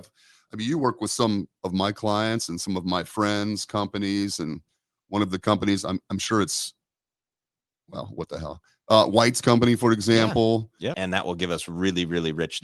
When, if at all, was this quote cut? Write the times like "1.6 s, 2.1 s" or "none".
10.9 s